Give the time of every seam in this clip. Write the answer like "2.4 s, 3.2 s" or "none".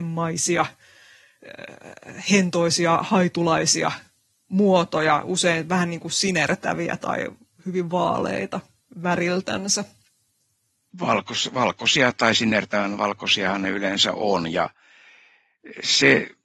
none